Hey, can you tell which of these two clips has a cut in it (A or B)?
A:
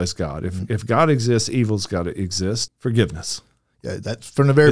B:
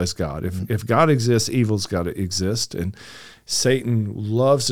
A